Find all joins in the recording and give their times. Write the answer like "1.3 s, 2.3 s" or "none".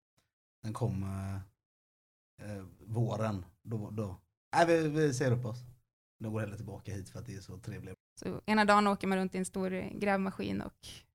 7.9 s